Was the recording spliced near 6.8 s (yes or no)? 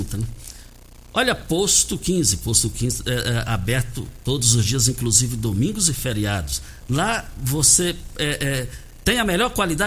yes